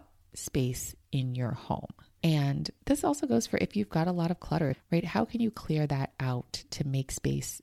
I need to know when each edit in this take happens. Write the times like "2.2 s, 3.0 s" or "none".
4.7 s